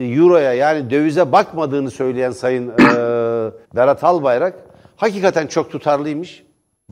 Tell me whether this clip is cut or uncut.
cut